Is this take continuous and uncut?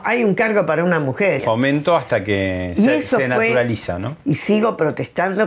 no; 2 cuts; at 1.4 s, 4.2 s

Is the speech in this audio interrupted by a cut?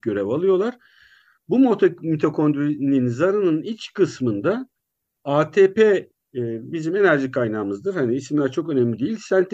no; 0 cuts

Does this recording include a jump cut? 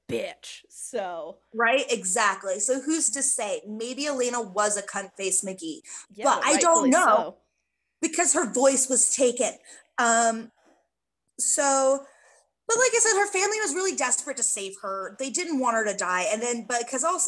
no; 0 cuts

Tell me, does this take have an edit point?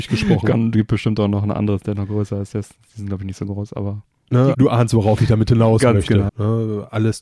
yes; 2 cuts; at 4.5 s, 6.3 s

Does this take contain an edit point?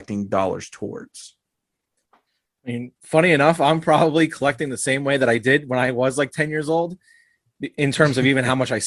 no; 0 cuts

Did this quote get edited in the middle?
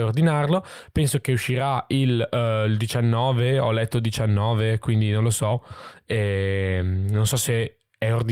no; 0 cuts

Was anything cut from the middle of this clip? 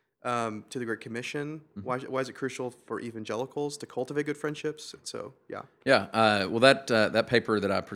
no; 0 cuts

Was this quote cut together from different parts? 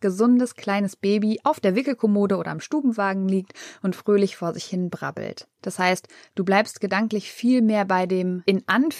yes; 1 cut; at 5.6 s

